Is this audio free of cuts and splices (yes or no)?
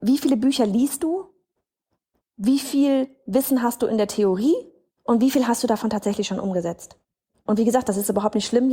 yes